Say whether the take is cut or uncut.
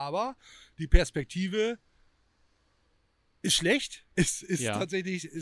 cut